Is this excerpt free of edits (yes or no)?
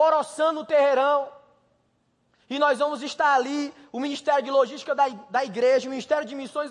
yes